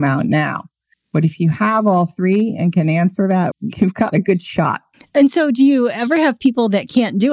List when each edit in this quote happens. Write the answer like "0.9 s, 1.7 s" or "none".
0.9 s, 3.5 s